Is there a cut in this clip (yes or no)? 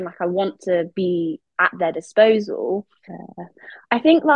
yes